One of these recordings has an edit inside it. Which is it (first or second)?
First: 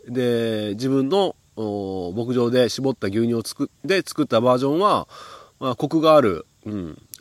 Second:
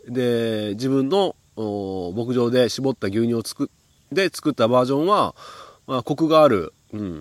first